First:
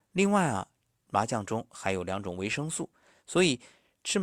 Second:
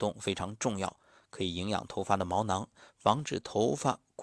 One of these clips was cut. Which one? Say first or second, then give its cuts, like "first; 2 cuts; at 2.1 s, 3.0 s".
first; 1 cut; at 3.1 s